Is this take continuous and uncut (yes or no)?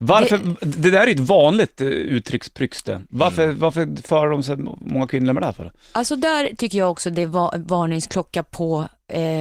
yes